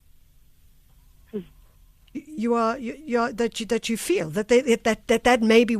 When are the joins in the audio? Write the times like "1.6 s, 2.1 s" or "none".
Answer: 2.1 s